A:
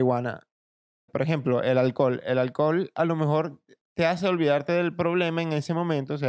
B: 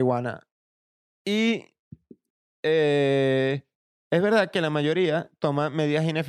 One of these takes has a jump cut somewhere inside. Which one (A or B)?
A